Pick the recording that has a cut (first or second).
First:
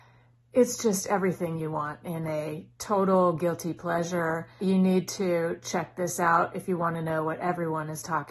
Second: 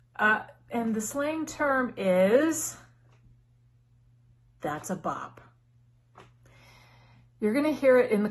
first